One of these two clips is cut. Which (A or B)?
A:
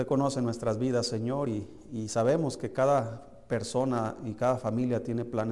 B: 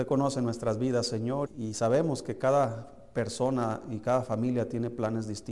B